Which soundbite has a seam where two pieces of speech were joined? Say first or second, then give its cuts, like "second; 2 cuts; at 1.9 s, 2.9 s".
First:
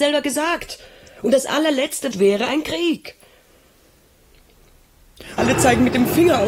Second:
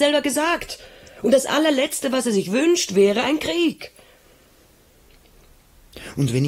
first; 2 cuts; at 2.1 s, 5.4 s